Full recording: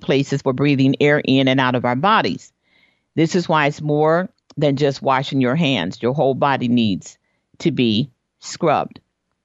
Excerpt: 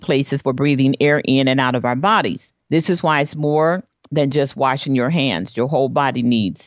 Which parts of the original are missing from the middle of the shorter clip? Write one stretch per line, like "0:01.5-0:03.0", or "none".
0:02.6-0:03.1